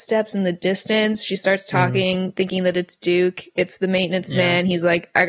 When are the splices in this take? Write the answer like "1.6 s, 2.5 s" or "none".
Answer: none